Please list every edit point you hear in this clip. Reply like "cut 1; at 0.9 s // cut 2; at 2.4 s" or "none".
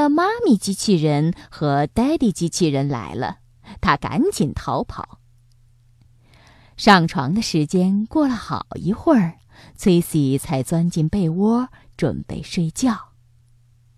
none